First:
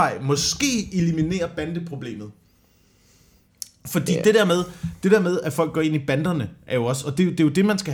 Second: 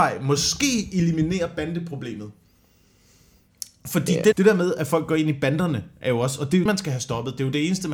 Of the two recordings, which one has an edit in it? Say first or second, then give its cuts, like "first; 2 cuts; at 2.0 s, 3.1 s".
second; 2 cuts; at 4.3 s, 6.7 s